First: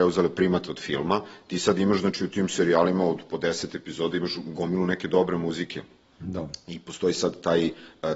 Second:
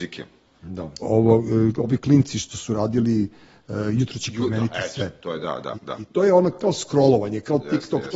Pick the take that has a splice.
second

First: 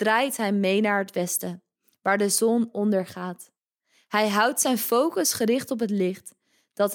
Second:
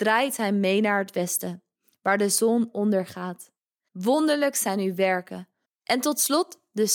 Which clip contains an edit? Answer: second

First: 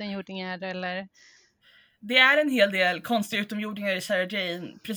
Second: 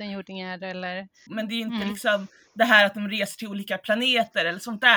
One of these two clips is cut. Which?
second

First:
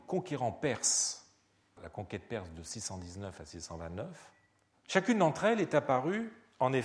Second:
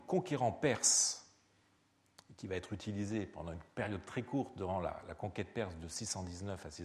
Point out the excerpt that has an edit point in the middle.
first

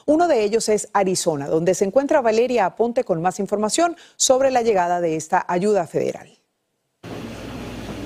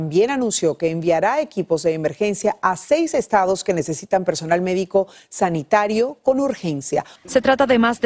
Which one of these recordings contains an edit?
second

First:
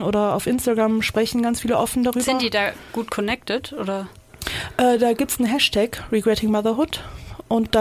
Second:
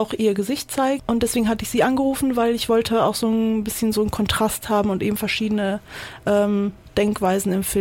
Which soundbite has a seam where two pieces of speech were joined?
second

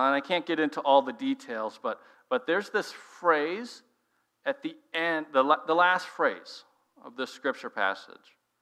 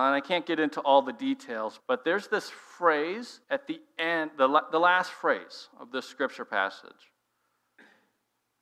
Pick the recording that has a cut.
second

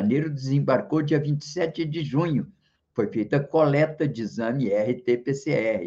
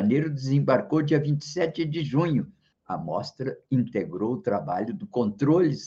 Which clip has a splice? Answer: second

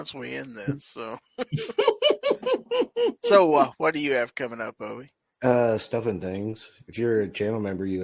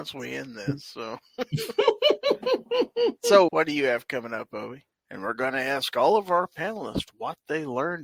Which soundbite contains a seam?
second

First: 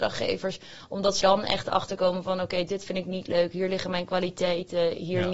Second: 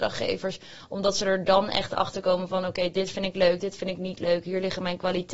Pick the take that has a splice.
first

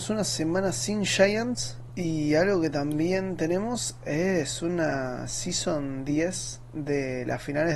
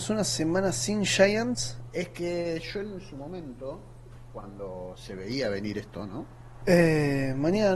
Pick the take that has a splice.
second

